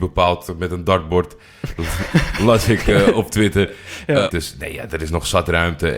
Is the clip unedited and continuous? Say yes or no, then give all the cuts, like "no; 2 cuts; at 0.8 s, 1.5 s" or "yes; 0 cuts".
no; 1 cut; at 4.3 s